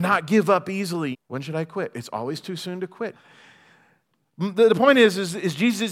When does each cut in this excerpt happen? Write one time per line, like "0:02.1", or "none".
0:01.1
0:03.1